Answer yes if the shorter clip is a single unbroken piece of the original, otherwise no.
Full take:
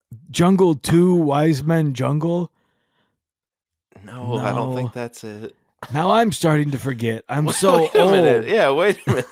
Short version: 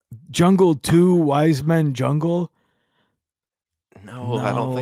yes